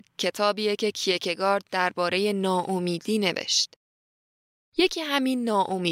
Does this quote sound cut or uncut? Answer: cut